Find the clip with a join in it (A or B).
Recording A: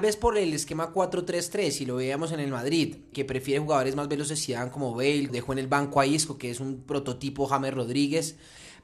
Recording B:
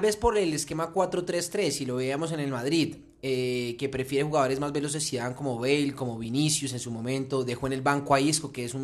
A